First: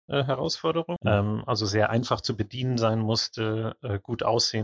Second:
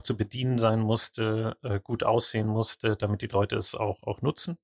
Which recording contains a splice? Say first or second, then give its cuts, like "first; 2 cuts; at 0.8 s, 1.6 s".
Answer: first; 1 cut; at 1.0 s